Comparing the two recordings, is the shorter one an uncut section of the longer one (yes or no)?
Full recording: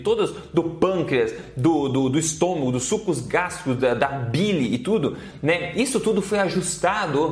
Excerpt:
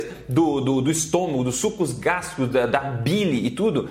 yes